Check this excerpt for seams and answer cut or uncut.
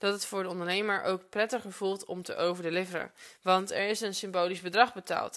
uncut